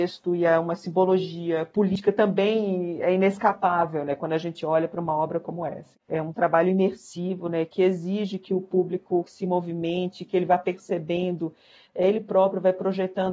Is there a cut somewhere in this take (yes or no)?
yes